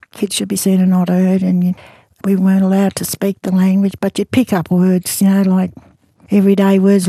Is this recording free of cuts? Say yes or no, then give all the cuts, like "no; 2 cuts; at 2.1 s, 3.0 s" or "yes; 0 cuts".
yes; 0 cuts